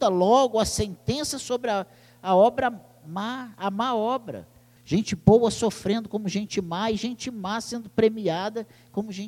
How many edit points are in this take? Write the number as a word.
one